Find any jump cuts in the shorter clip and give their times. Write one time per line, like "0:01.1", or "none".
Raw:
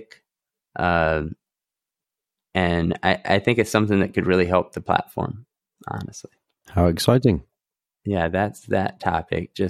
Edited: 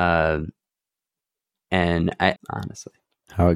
0:02.4